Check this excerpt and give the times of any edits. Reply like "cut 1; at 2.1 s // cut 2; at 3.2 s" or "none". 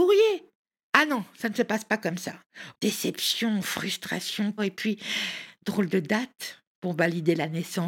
cut 1; at 0.9 s // cut 2; at 2.7 s // cut 3; at 4.6 s